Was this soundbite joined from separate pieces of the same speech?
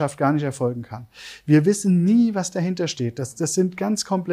no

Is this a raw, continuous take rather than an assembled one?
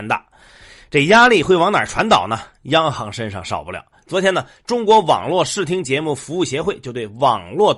no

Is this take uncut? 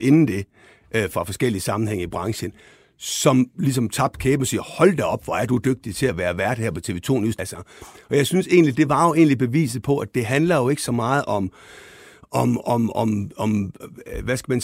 no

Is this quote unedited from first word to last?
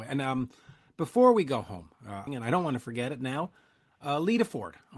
no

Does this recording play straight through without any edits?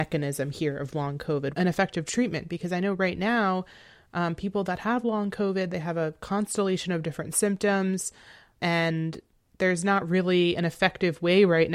no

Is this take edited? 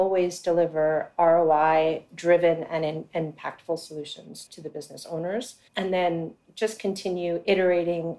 yes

